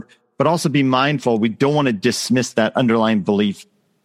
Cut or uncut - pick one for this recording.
uncut